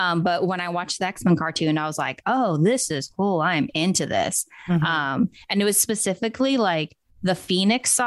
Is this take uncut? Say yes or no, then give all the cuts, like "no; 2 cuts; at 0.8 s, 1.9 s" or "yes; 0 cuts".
yes; 0 cuts